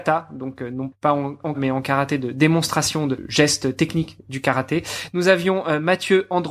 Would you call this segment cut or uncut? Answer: cut